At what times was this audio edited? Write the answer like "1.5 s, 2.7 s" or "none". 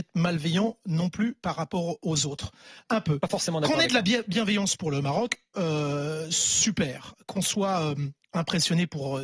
2.8 s